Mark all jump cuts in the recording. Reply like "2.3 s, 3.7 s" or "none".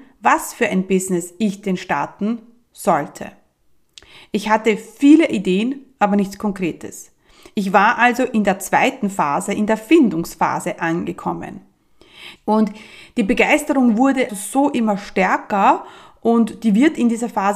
12.4 s, 14.3 s